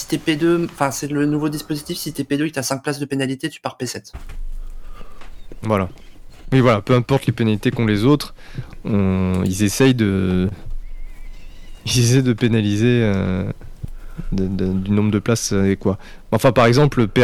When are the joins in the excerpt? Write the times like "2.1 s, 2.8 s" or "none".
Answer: none

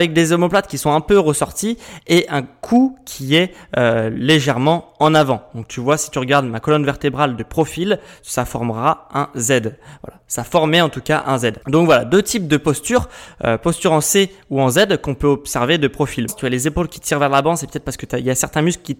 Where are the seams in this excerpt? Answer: 11.6 s, 16.3 s

